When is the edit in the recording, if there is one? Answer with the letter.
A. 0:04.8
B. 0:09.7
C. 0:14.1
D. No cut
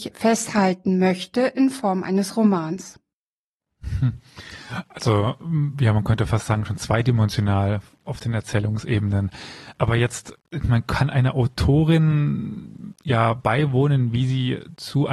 D